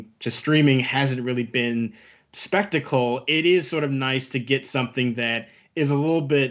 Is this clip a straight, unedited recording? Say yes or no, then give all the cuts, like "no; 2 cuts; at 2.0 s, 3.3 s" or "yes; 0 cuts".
yes; 0 cuts